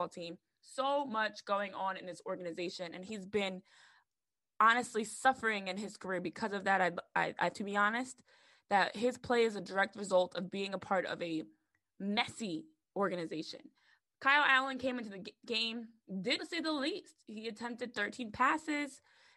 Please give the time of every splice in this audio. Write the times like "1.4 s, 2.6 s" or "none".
7.5 s, 16.4 s